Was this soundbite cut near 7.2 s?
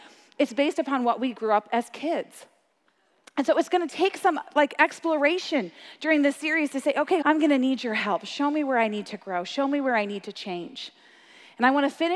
yes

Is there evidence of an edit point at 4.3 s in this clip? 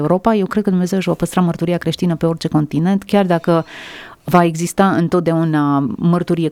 yes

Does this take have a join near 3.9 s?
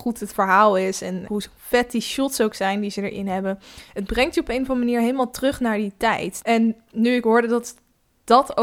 no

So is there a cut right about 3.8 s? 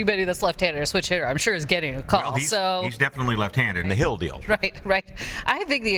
yes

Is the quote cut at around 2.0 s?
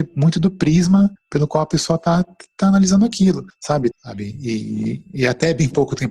no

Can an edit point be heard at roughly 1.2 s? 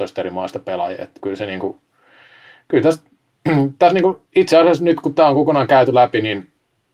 yes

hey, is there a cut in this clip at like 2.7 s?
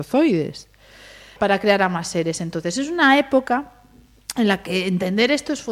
no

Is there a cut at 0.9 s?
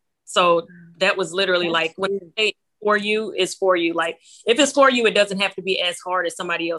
no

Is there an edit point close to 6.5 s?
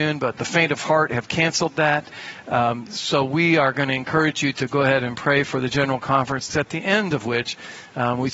yes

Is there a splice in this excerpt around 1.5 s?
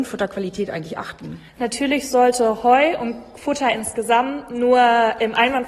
yes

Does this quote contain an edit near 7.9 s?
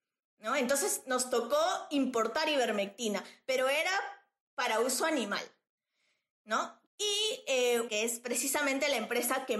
yes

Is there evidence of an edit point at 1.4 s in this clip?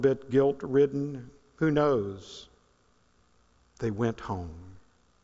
no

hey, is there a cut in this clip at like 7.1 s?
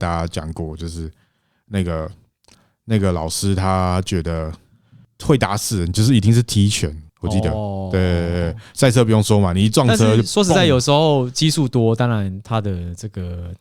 yes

